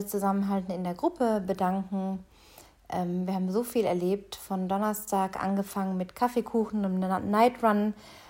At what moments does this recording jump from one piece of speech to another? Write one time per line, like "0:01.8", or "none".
none